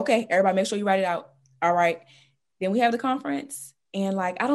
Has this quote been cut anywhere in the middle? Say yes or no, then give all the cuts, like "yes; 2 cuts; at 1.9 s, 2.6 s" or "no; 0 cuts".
no; 0 cuts